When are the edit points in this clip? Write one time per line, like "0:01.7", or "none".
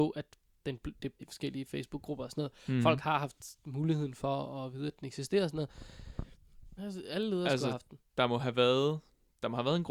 0:01.2
0:06.8